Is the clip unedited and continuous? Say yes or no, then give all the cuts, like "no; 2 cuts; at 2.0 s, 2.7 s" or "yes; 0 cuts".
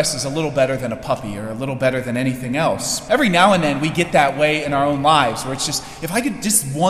no; 1 cut; at 3.1 s